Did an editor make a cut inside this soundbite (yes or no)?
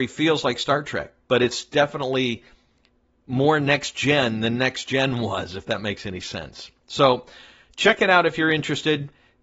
no